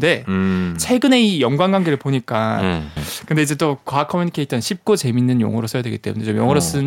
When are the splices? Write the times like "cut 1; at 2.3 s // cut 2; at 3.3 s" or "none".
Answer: cut 1; at 3.0 s